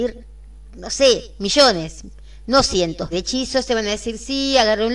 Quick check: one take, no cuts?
no; 1 cut; at 3.1 s

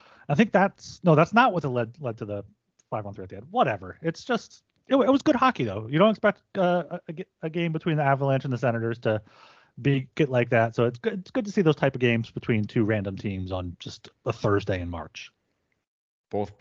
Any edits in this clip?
no; 0 cuts

